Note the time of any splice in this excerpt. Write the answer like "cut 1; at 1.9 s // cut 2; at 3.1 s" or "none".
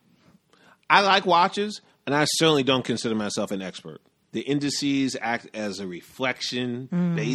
cut 1; at 4.2 s

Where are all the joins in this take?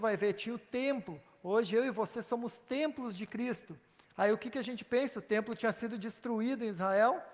cut 1; at 4.0 s

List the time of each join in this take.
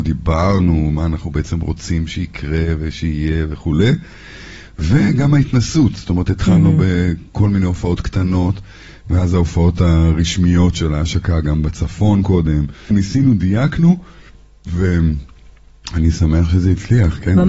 cut 1; at 12.9 s

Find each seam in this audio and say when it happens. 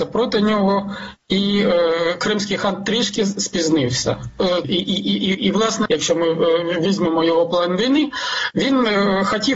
cut 1; at 4.6 s // cut 2; at 5.9 s

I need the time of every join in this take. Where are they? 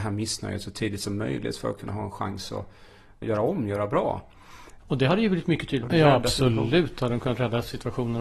cut 1; at 3.2 s // cut 2; at 4.8 s // cut 3; at 5.8 s

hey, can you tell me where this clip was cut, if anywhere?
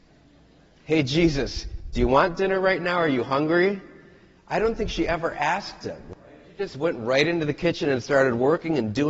none

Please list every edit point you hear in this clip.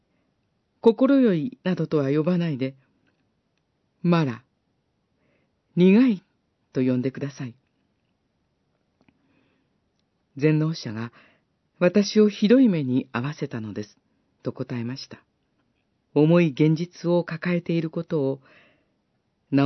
cut 1; at 16.0 s

